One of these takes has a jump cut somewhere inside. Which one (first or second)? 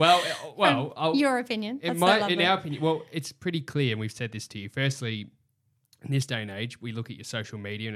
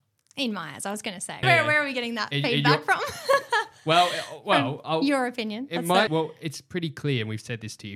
second